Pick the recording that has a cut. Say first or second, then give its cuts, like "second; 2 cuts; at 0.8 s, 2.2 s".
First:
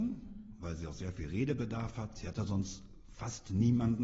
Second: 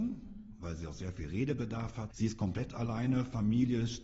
second; 1 cut; at 2.1 s